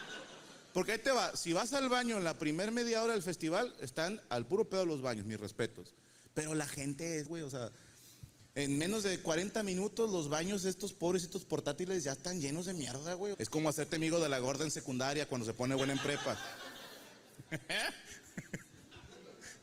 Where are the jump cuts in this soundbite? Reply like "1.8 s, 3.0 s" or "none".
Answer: 7.3 s, 13.3 s